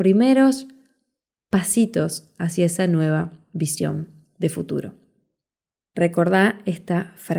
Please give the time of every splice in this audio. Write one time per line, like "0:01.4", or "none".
none